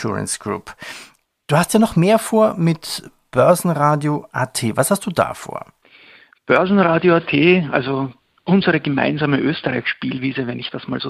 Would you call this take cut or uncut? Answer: uncut